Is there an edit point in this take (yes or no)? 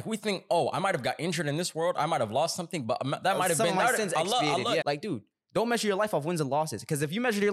yes